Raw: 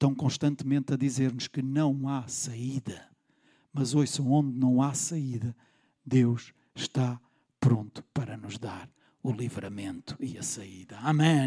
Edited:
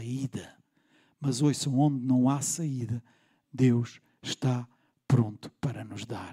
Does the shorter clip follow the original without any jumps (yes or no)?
yes